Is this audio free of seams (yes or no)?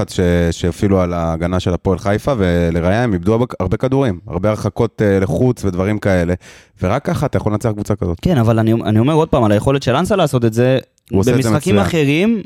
yes